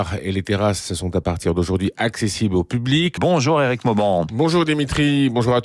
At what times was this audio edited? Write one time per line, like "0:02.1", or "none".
0:03.2